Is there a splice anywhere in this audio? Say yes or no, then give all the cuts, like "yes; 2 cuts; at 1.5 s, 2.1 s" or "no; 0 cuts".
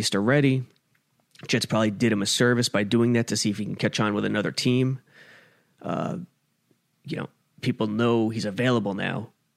no; 0 cuts